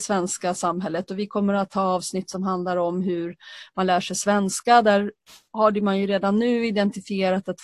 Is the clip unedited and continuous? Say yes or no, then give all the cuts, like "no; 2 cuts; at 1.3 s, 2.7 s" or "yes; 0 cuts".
yes; 0 cuts